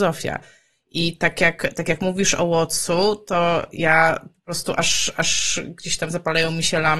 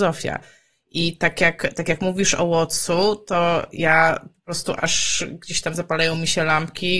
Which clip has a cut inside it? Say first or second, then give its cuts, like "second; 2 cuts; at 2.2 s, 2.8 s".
second; 1 cut; at 4.8 s